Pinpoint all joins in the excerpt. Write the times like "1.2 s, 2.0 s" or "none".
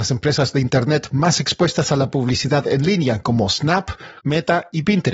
4.2 s